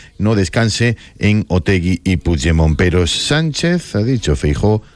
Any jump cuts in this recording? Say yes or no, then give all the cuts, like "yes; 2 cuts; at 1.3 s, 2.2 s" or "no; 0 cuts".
no; 0 cuts